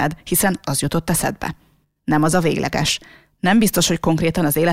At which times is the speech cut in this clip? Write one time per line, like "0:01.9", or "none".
none